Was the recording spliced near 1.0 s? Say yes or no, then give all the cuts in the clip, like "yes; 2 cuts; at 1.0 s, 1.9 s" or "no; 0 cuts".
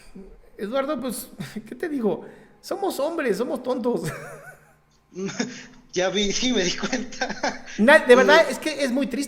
no; 0 cuts